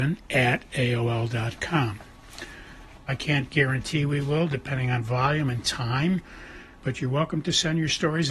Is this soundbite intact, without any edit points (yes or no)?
no